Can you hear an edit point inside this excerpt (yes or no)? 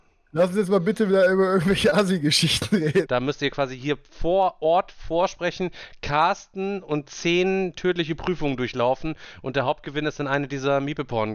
yes